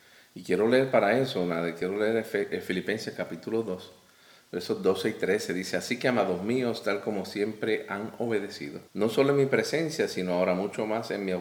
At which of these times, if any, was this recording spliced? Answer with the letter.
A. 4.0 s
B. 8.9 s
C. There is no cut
B